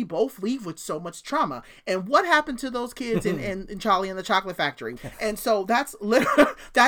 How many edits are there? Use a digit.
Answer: 1